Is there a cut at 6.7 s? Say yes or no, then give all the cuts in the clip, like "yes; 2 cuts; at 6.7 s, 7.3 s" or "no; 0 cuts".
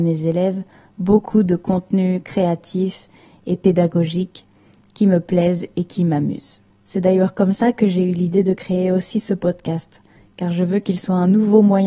yes; 1 cut; at 6.7 s